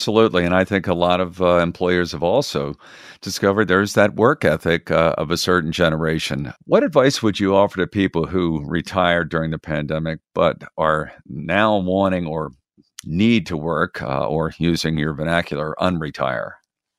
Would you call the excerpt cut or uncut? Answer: uncut